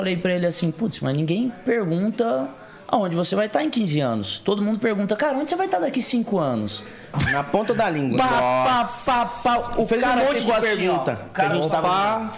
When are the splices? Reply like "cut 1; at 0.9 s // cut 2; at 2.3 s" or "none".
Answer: cut 1; at 7.1 s